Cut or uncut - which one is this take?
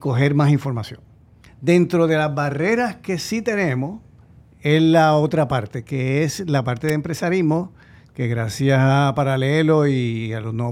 cut